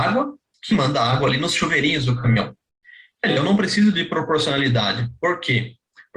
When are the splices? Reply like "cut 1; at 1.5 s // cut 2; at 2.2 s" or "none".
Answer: none

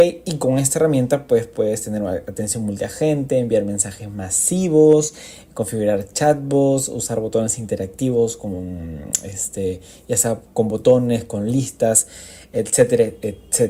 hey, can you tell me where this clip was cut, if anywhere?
none

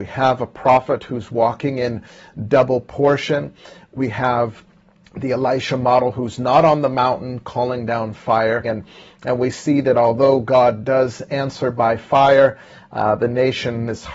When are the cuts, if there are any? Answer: cut 1; at 8.6 s

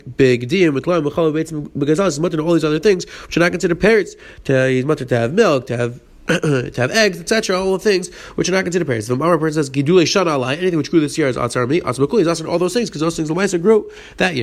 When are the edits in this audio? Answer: none

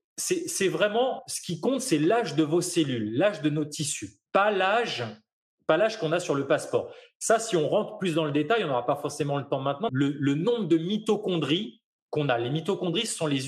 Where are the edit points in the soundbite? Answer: cut 1; at 4.3 s // cut 2; at 9.9 s

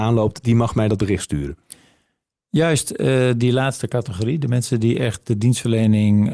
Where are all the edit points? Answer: none

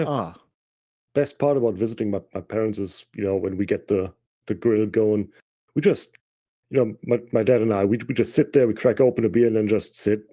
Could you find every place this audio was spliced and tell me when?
none

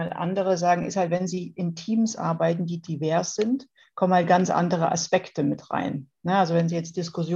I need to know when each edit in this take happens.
none

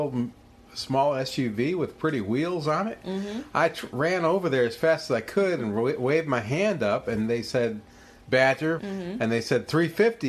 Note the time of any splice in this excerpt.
cut 1; at 8.8 s

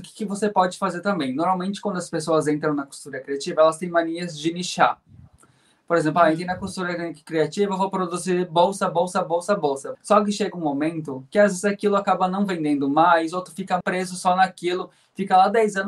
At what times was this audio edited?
cut 1; at 9.9 s // cut 2; at 13.8 s

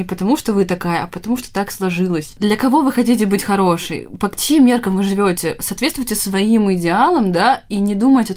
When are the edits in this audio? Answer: none

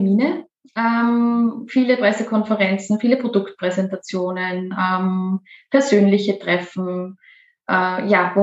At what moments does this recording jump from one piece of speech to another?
none

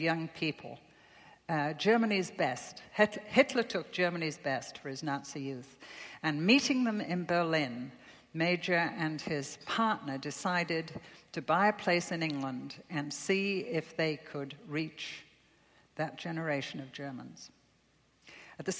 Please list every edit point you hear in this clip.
none

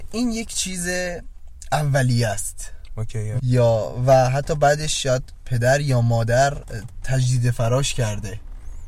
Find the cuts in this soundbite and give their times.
cut 1; at 3.4 s

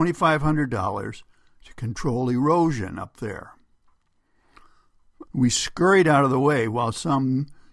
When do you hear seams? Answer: cut 1; at 5.2 s

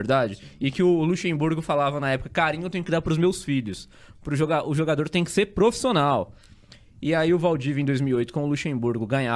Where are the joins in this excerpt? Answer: none

